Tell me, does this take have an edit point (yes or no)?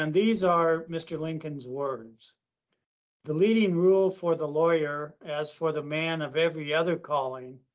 no